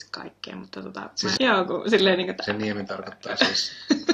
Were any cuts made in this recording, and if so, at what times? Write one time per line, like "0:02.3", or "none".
0:01.4